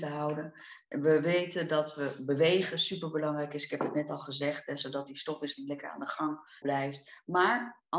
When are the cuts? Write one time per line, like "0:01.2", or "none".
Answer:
0:06.6